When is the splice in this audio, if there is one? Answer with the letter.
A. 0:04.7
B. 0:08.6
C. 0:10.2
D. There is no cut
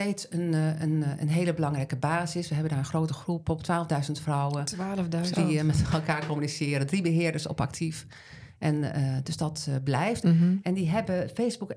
C